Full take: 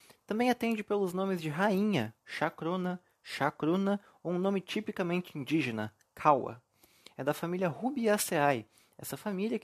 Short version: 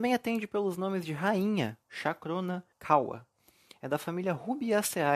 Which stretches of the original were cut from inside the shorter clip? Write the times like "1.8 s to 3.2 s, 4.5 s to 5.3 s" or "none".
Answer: 3.1 s to 6.1 s